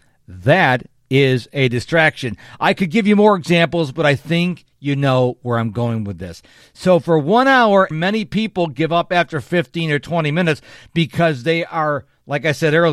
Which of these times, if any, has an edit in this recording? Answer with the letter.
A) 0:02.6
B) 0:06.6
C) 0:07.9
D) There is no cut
C